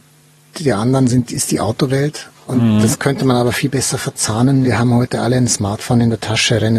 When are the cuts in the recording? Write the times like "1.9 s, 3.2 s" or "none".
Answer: 4.6 s